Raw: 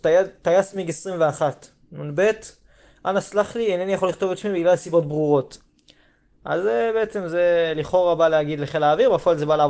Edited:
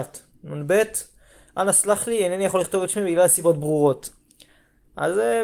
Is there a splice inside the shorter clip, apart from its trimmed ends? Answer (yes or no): no